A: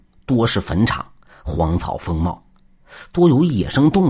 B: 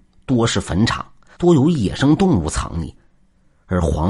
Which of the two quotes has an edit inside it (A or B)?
B